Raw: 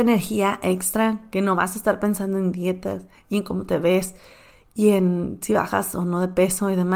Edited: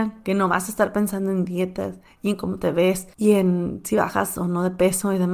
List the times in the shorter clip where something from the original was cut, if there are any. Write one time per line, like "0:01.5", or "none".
0:03.1